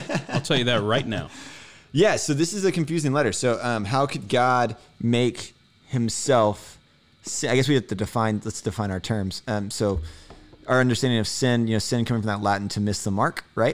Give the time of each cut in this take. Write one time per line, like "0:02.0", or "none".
none